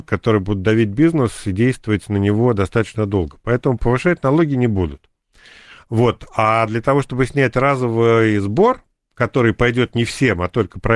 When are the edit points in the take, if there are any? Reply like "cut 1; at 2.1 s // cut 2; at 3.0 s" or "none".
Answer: none